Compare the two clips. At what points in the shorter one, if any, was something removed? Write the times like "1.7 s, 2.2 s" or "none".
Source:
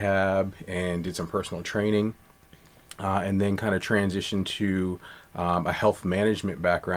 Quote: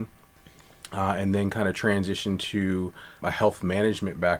3.2 s